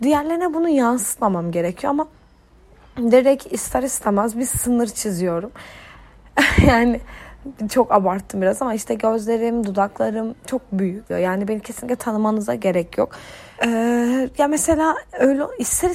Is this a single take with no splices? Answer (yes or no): no